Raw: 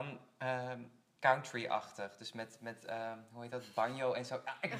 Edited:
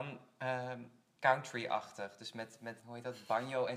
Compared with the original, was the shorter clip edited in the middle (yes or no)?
yes